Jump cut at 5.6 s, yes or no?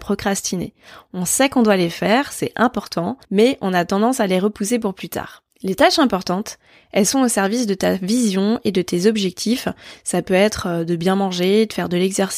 no